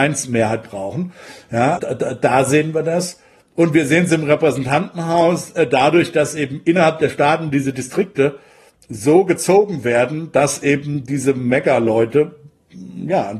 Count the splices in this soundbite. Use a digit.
1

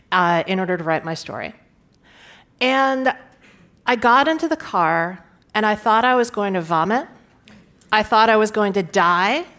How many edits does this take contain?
0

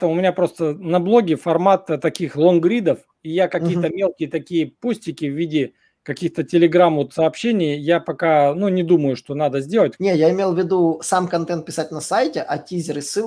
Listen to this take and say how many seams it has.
1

